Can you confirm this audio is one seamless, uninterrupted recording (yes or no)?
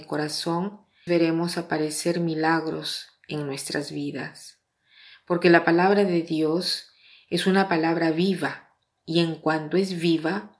no